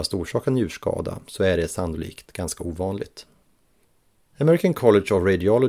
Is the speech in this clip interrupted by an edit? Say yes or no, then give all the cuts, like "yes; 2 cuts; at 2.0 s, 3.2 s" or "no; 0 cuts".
no; 0 cuts